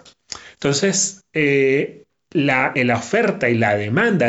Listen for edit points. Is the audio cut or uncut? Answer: cut